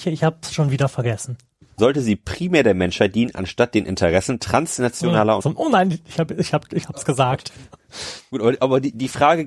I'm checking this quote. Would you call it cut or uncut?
cut